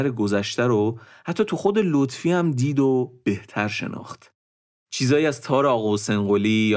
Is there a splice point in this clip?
yes; 1 cut; at 4.8 s

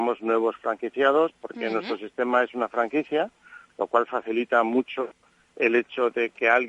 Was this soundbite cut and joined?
no; 0 cuts

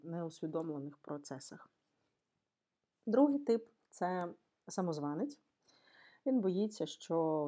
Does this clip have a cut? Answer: no; 0 cuts

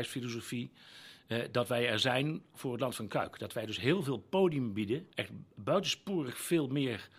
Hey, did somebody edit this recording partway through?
yes; 1 cut; at 5.1 s

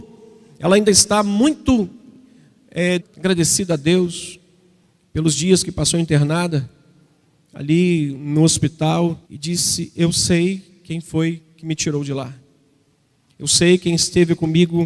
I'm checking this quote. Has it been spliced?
yes; 2 cuts; at 3.0 s, 9.2 s

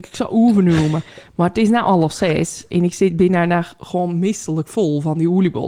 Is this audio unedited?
yes; 0 cuts

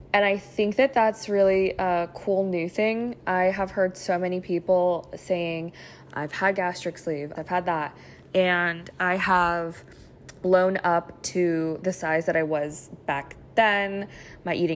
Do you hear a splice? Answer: yes; 2 cuts; at 7.4 s, 10.4 s

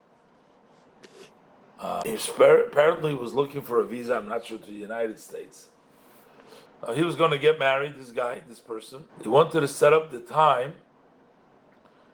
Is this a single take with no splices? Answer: no; 2 cuts; at 6.7 s, 9.1 s

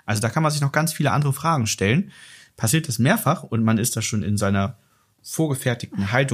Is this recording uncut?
yes; 0 cuts

